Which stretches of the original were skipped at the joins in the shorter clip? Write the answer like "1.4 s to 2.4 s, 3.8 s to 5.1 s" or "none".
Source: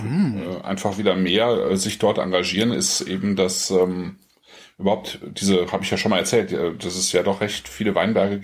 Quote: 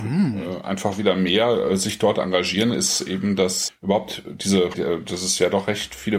3.7 s to 4.6 s, 5.7 s to 6.5 s

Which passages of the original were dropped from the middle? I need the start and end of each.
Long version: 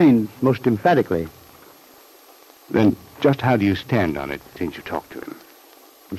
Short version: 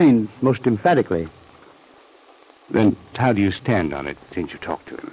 3.1 s to 3.4 s

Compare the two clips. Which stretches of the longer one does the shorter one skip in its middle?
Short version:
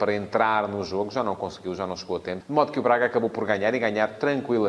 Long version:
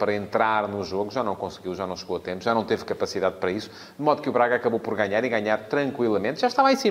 2.4 s to 3.9 s

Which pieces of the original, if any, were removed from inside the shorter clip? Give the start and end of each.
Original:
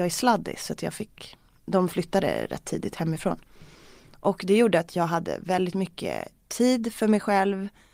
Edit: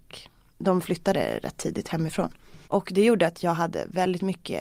3.7 s to 4.2 s

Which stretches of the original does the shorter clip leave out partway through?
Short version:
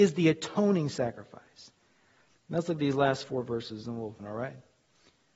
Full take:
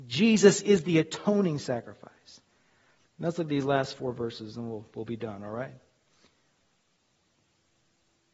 4.9 s to 5.4 s

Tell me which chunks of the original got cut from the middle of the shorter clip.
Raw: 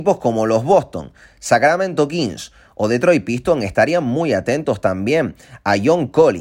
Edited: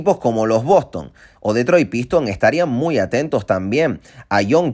1.3 s to 2.7 s

